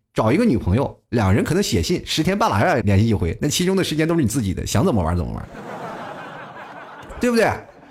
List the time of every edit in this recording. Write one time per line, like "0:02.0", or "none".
0:02.8